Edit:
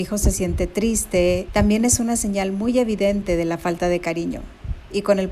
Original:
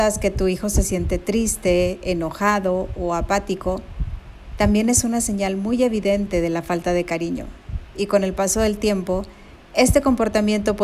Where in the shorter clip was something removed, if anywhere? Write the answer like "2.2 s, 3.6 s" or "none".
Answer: 1.5 s